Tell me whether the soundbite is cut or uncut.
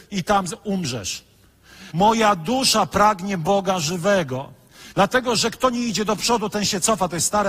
cut